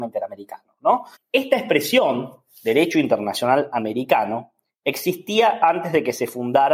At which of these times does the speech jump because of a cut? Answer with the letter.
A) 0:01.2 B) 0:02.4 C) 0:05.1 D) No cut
A